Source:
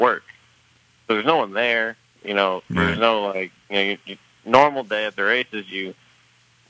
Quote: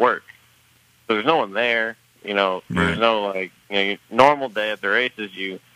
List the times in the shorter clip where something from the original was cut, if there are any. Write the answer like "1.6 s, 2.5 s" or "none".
4.0 s